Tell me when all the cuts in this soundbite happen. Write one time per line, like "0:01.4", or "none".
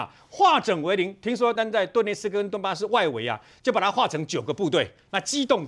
0:01.6